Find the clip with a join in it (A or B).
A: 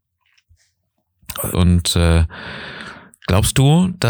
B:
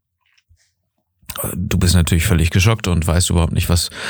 A